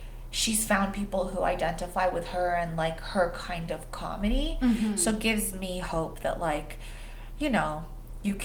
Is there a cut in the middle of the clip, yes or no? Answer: no